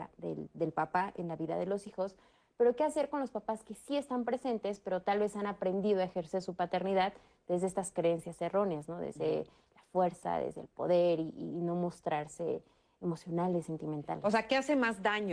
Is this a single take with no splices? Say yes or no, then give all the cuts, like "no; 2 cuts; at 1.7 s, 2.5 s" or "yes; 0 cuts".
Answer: yes; 0 cuts